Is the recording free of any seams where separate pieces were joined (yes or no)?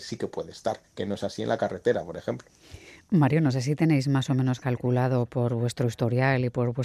yes